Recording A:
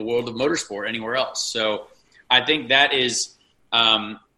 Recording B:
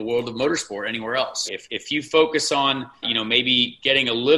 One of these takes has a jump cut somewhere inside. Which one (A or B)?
B